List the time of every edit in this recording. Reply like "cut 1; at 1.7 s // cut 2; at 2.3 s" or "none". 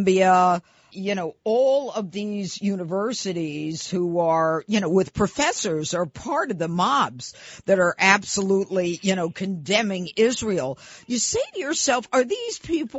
cut 1; at 0.9 s